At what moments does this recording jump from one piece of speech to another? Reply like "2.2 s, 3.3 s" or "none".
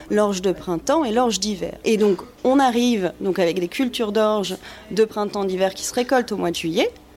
1.8 s